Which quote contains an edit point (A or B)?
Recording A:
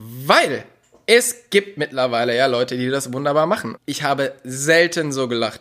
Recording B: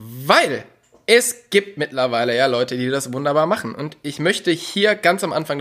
A